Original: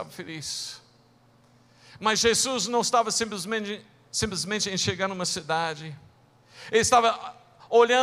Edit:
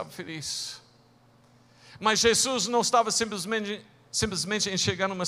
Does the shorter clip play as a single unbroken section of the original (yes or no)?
yes